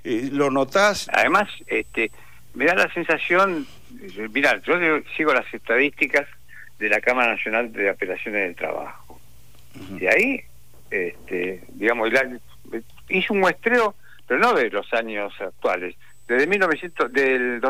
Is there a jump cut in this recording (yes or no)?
yes